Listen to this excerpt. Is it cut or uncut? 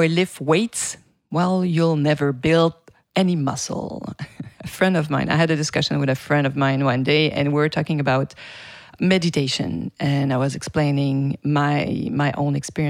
uncut